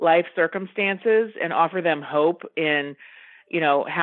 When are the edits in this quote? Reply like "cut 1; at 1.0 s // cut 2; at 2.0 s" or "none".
none